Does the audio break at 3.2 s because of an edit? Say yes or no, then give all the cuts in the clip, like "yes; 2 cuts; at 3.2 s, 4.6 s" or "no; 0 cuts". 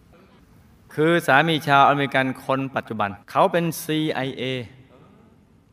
yes; 1 cut; at 3.2 s